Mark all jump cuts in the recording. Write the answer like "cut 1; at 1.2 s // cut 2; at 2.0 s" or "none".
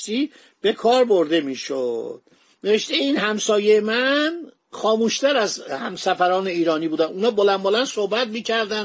none